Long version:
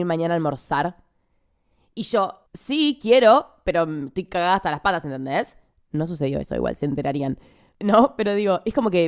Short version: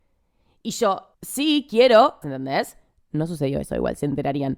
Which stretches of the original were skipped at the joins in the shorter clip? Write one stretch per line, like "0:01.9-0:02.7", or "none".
0:03.5-0:05.0